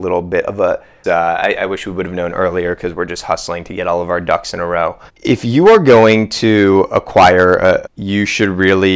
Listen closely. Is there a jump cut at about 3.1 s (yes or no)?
no